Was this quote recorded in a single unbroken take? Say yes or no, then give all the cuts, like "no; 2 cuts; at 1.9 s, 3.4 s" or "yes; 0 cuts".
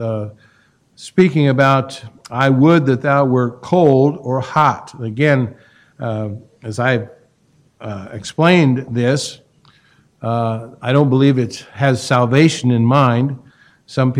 yes; 0 cuts